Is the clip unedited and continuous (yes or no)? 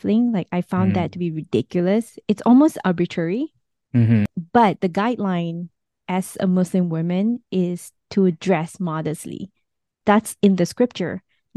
yes